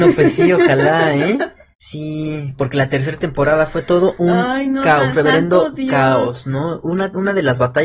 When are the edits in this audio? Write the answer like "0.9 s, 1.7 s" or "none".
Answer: 1.7 s